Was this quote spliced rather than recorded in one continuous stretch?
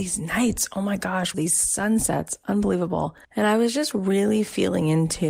yes; 2 cuts; at 1.3 s, 3.2 s

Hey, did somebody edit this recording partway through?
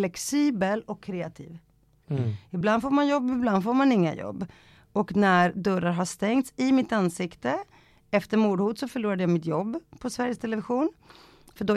yes; 1 cut; at 2.0 s

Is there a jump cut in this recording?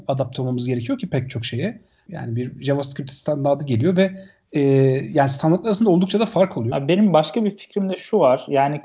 yes; 2 cuts; at 2.1 s, 6.7 s

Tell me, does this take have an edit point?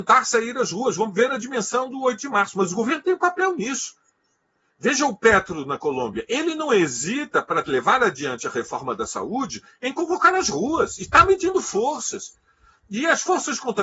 no; 0 cuts

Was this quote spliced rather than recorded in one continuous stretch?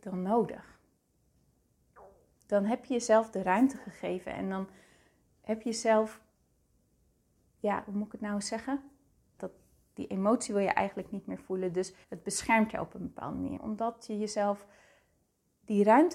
yes; 3 cuts; at 9.4 s, 12.0 s, 13.6 s

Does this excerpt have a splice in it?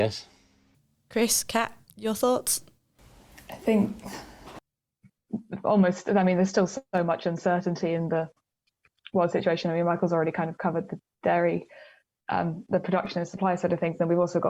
no; 0 cuts

